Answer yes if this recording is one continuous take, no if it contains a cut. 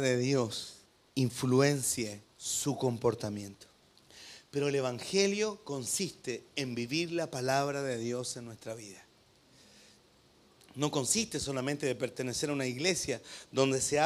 yes